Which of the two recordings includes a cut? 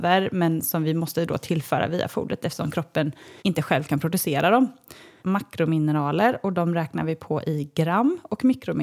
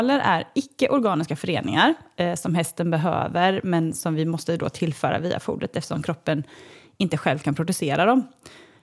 first; 2 cuts; at 3.4 s, 5.2 s

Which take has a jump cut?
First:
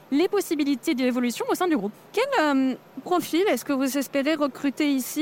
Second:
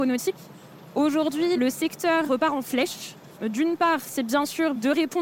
second; 2 cuts; at 2.3 s, 3.4 s

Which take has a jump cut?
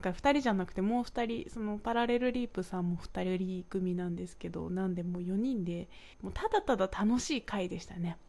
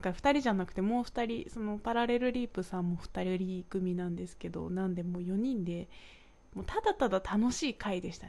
first; 1 cut; at 6.1 s

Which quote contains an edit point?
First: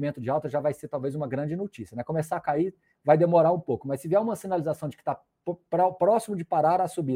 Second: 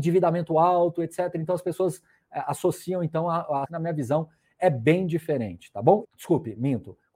second; 2 cuts; at 3.6 s, 6.0 s

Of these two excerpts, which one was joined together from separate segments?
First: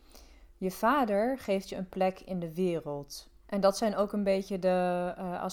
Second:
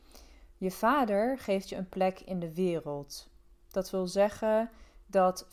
first; 1 cut; at 3.4 s

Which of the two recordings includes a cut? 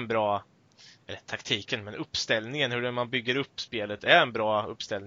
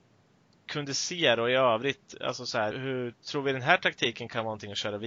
second; 1 cut; at 2.7 s

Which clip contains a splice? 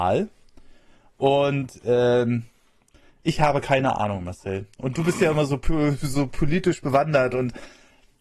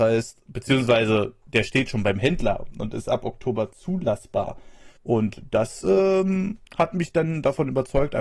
second; 2 cuts; at 5.0 s, 6.7 s

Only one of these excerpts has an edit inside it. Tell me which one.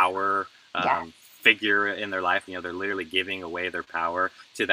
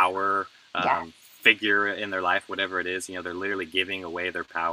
first; 1 cut; at 2.5 s

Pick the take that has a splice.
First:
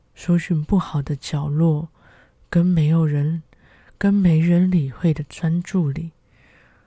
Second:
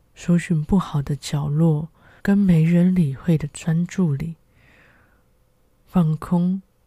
second; 1 cut; at 2.2 s

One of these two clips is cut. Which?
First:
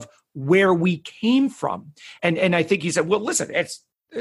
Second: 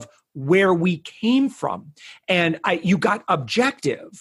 first; 1 cut; at 2.2 s

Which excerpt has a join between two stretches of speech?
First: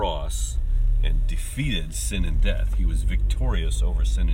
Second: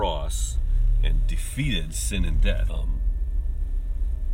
second; 1 cut; at 2.7 s

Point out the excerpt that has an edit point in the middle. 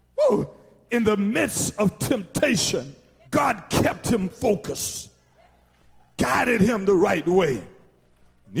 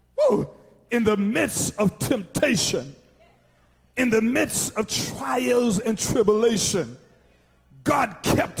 first; 1 cut; at 3.2 s

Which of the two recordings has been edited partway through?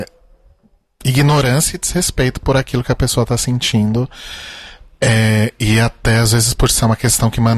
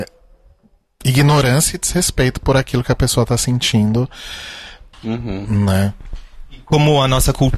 second; 1 cut; at 4.9 s

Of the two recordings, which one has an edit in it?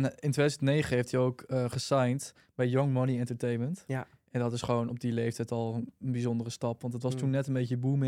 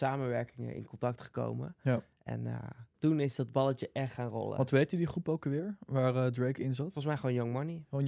second; 1 cut; at 2.9 s

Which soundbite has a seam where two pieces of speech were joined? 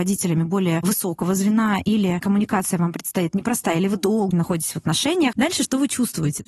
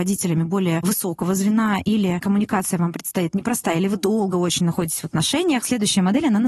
first; 2 cuts; at 4.3 s, 5.3 s

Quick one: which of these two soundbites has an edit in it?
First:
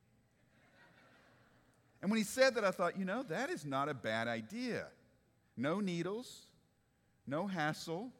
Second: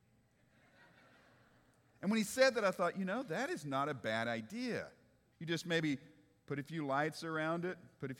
second; 1 cut; at 5.3 s

